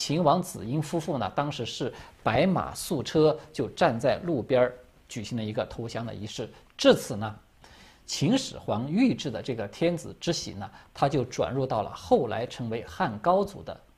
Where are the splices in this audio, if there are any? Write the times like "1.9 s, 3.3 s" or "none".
6.7 s